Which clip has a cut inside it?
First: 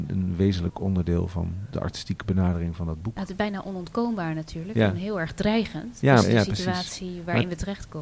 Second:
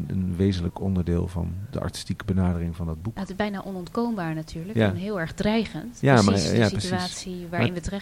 first; 1 cut; at 6.2 s

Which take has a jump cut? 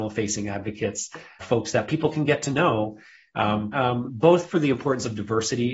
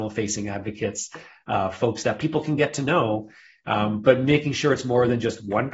first; 2 cuts; at 1.4 s, 3.7 s

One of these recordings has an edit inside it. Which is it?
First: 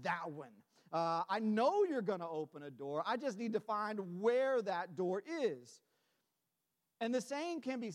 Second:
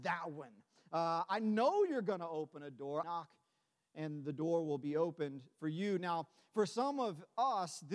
second; 1 cut; at 3.0 s

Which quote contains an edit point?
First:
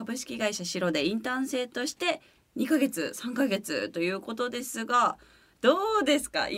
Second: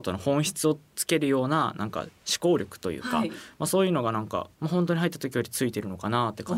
second; 1 cut; at 4.5 s

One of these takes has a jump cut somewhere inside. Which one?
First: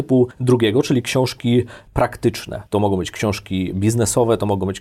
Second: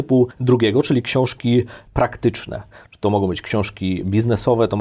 first; 1 cut; at 2.7 s

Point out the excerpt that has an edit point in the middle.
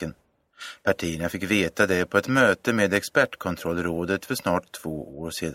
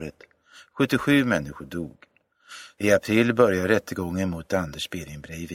second; 1 cut; at 2.8 s

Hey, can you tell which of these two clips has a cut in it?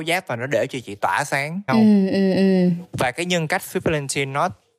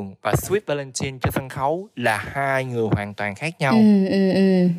first; 1 cut; at 1.7 s

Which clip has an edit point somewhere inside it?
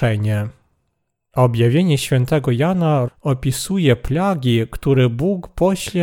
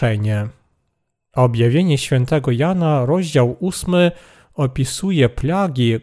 first; 1 cut; at 3.1 s

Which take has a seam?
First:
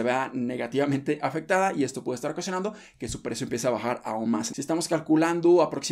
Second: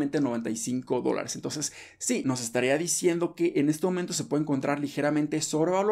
first; 1 cut; at 4.5 s

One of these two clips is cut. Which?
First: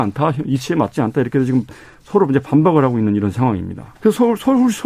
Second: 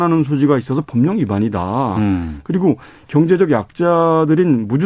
first; 1 cut; at 3.9 s

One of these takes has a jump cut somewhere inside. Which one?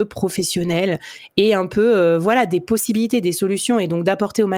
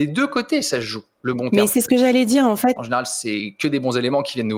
second; 1 cut; at 2.8 s

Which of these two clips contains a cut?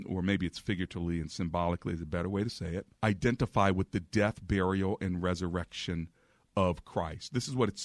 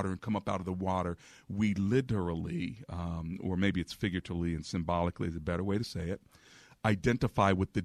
first; 1 cut; at 2.9 s

